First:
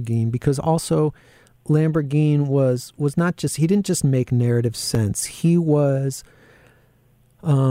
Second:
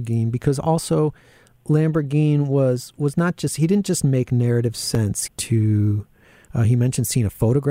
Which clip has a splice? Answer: second; 1 cut; at 5.3 s

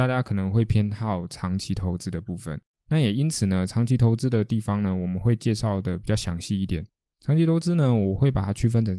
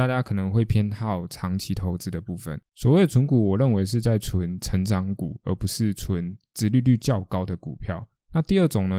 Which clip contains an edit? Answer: second; 1 cut; at 2.7 s

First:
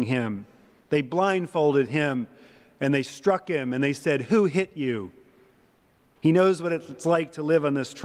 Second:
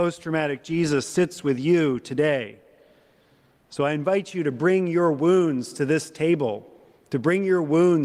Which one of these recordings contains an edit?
first; 1 cut; at 6.2 s

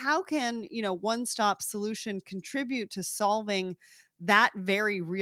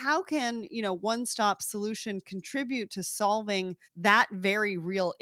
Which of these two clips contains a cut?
second; 1 cut; at 3.8 s

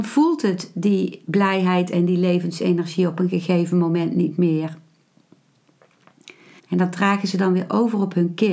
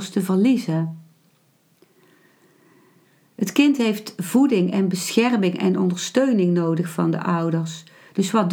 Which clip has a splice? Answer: first; 1 cut; at 6.6 s

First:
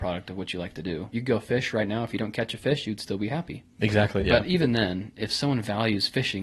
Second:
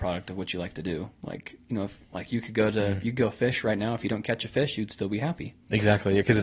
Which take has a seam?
first; 2 cuts; at 1.1 s, 4.2 s

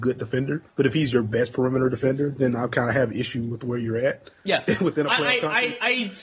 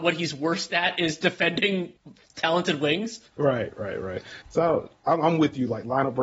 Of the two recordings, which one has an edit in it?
second; 2 cuts; at 3.3 s, 4.4 s

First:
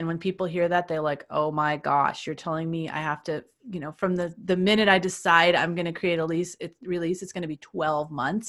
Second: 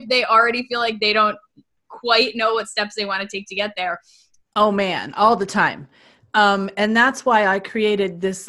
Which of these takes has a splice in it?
second; 1 cut; at 4.4 s

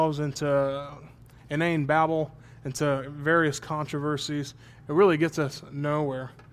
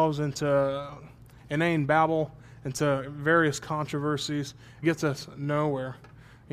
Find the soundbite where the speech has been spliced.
second; 1 cut; at 4.8 s

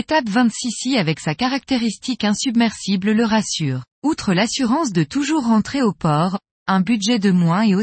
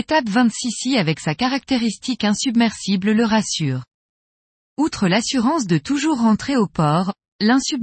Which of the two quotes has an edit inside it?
first; 2 cuts; at 3.9 s, 6.5 s

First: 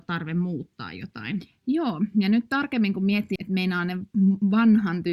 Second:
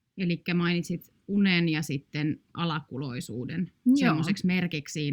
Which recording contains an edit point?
first; 1 cut; at 3.4 s

